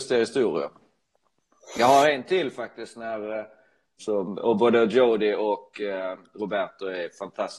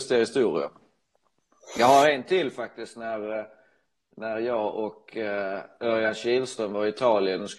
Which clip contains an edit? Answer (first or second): first